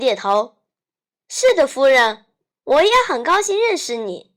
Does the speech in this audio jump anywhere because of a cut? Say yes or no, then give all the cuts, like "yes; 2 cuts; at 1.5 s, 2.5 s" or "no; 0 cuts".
no; 0 cuts